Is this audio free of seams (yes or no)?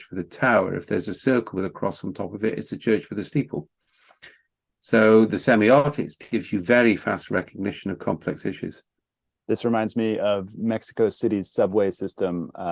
yes